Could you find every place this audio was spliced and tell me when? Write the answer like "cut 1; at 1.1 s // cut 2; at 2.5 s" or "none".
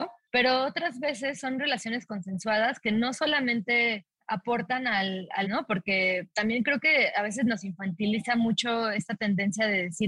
cut 1; at 5.4 s